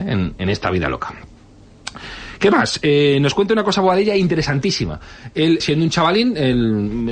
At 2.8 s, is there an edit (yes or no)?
no